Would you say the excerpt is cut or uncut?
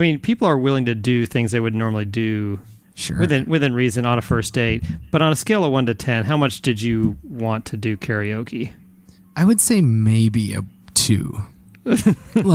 uncut